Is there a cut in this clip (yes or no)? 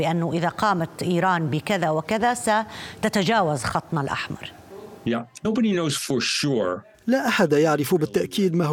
yes